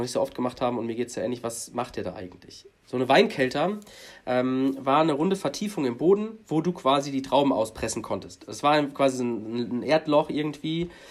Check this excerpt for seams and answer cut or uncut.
uncut